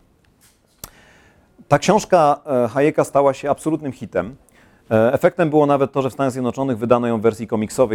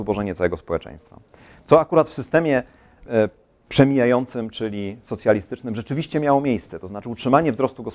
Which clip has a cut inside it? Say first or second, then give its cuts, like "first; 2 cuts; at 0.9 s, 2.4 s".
second; 1 cut; at 3.1 s